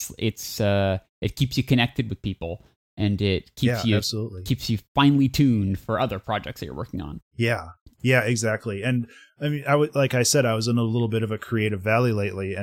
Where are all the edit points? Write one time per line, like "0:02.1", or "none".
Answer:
none

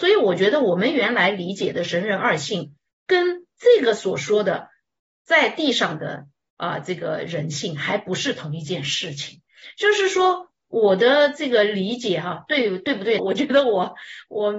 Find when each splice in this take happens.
0:13.2

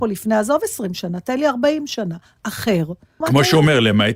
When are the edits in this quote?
0:03.2

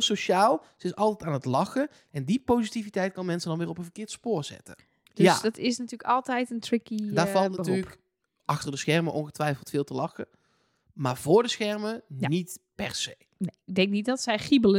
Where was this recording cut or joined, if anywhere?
0:05.1

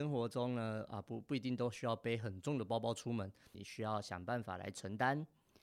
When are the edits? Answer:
0:03.5

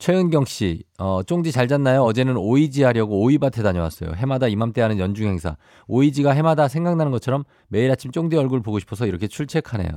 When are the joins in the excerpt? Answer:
none

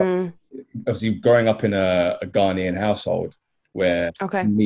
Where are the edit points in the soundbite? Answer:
none

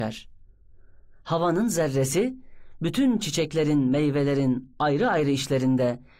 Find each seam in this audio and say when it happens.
none

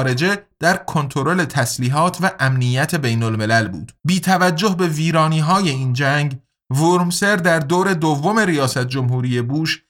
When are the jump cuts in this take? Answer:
0:04.0

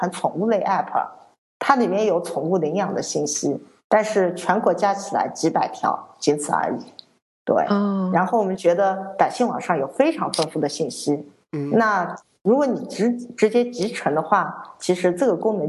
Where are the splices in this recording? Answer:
none

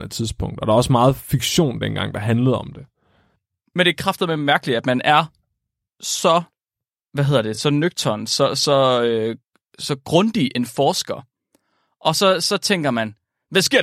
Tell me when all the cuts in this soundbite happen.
none

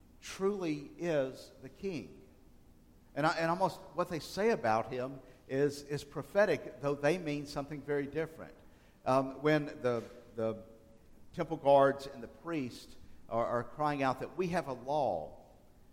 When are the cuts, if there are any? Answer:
none

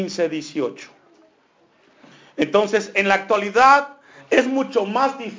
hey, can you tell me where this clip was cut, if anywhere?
none

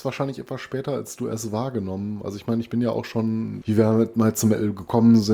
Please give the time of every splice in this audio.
0:03.6

